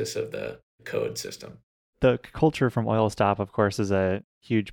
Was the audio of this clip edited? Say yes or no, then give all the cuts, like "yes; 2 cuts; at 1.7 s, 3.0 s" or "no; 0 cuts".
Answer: no; 0 cuts